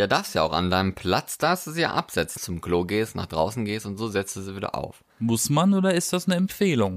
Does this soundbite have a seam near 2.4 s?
yes; 2 cuts; at 2.4 s, 5.1 s

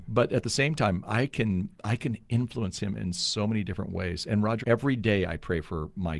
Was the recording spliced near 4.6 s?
yes; 1 cut; at 4.6 s

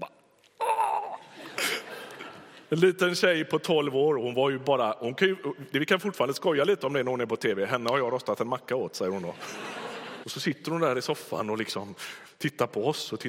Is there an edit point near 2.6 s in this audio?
yes; 2 cuts; at 2.6 s, 10.2 s

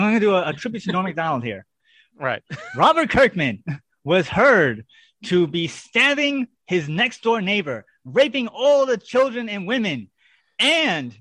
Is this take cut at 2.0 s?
no; 0 cuts

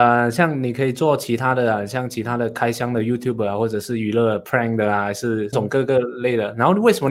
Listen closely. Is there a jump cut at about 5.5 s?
yes; 1 cut; at 5.5 s

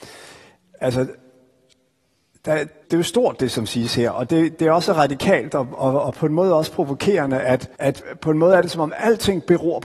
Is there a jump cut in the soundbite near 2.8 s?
yes; 2 cuts; at 2.8 s, 7.7 s

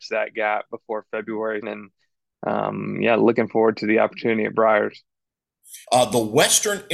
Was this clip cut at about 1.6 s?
yes; 2 cuts; at 1.6 s, 5.8 s

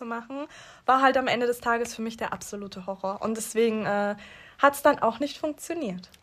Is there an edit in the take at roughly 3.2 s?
no; 0 cuts

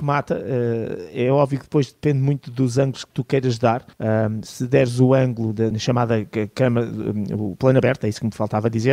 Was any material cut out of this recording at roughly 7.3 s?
no; 2 cuts; at 3.9 s, 5.7 s

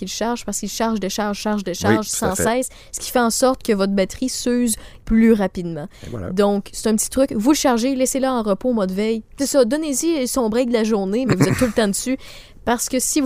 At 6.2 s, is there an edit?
no; 2 cuts; at 9.4 s, 11.3 s

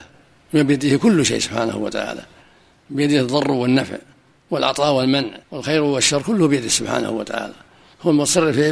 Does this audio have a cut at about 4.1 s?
no; 1 cut; at 5.4 s

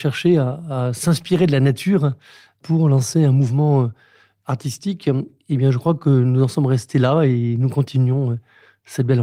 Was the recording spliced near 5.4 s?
no; 0 cuts

